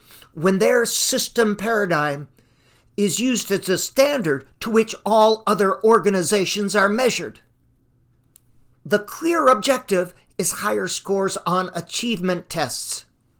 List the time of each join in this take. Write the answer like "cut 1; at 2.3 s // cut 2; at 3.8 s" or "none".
cut 1; at 8.8 s